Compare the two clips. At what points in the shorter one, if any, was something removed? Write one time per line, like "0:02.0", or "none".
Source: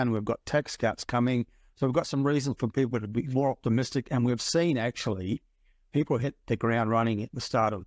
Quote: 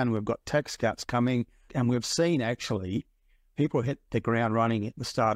0:01.7

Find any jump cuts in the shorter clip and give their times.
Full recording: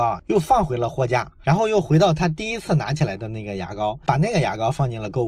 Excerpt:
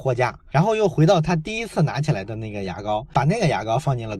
none

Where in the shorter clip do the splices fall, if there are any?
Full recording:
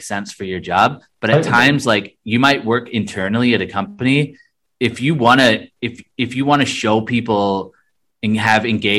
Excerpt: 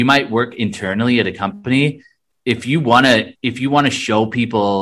0:03.3

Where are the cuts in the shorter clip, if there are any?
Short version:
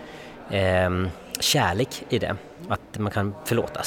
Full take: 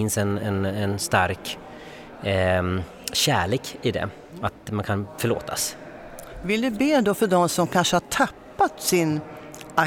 none

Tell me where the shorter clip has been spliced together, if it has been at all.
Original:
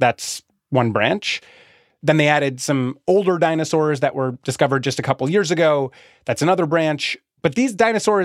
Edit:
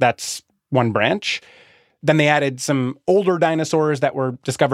none

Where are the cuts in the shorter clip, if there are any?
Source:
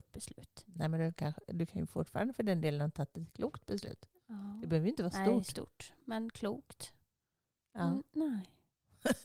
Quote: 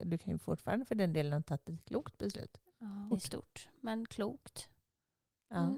0:03.1

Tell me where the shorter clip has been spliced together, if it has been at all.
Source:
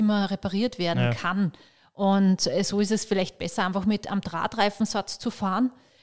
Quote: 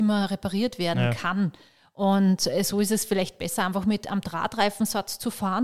none

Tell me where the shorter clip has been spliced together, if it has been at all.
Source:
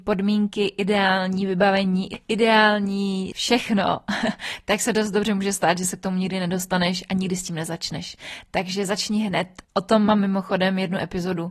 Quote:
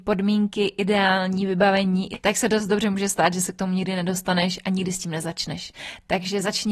0:02.2

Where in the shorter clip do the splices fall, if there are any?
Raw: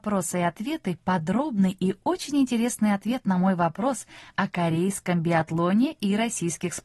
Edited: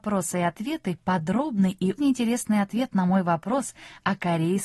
0:02.0

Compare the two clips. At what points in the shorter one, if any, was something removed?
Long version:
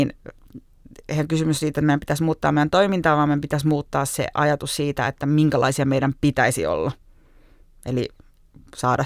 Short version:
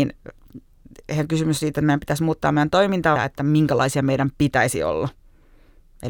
0:03.2

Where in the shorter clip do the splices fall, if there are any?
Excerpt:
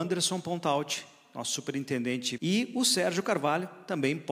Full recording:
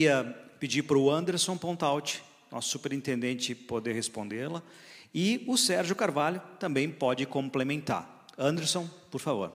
0:02.4

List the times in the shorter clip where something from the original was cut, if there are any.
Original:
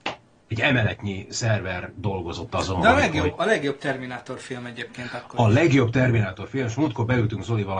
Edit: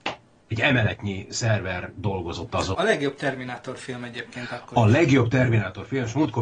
0:02.7

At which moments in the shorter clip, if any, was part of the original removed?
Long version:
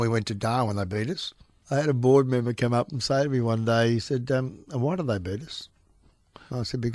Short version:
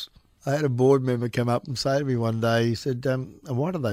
none

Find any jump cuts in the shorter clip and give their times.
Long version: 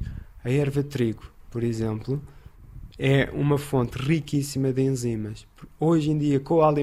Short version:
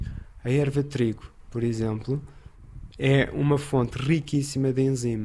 none

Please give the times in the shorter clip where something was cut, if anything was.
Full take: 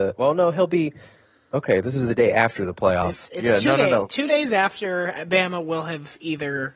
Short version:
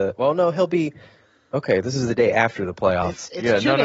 none

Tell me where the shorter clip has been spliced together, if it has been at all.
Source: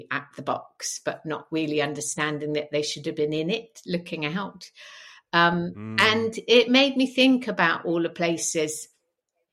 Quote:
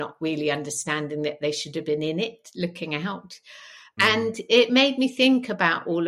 0:04.0

